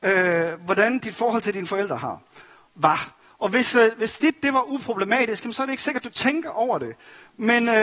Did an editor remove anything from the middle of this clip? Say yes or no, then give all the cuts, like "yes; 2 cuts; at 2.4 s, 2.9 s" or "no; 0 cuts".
no; 0 cuts